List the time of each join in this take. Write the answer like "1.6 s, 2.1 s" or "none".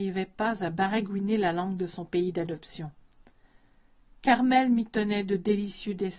none